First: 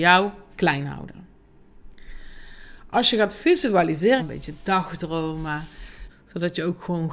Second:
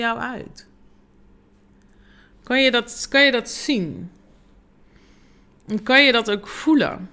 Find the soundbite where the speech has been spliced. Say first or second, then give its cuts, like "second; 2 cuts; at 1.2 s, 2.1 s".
first; 2 cuts; at 4.2 s, 6.1 s